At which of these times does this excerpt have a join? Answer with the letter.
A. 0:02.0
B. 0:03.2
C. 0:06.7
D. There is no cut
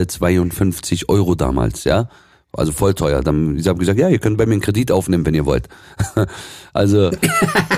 D